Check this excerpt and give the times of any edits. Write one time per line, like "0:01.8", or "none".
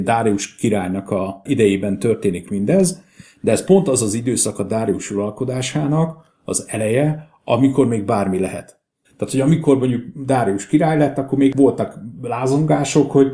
0:09.0